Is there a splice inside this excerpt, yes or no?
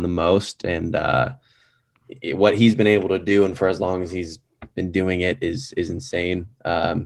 yes